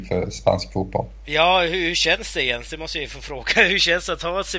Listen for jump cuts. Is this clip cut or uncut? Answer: uncut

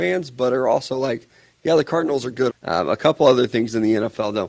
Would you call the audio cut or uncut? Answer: cut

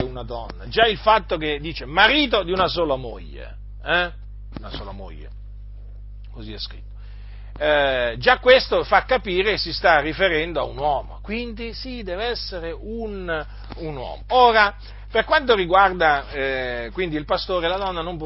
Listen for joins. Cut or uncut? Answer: cut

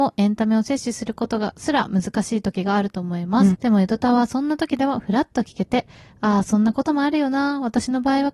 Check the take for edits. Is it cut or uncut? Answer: cut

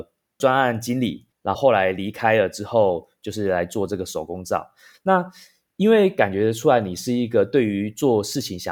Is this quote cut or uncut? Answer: cut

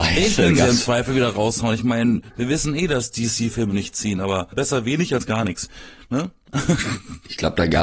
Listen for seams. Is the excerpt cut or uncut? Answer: cut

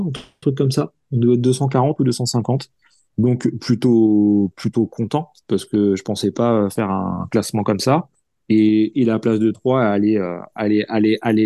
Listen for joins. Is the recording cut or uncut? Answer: uncut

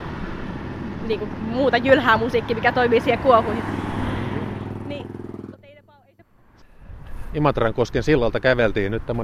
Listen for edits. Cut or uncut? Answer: cut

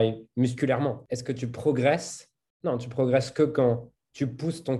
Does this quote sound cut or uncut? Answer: uncut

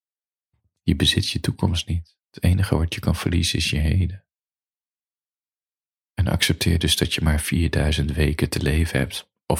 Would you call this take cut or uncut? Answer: uncut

